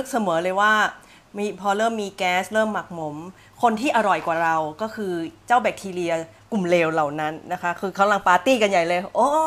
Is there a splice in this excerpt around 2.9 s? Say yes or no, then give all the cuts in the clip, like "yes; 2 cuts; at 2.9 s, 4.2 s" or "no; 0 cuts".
no; 0 cuts